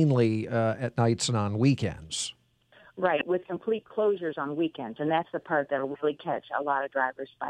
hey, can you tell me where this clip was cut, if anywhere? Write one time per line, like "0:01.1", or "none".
none